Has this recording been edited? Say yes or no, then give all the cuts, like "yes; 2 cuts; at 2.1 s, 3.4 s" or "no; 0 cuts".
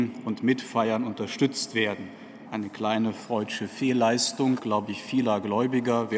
yes; 2 cuts; at 2.5 s, 4.6 s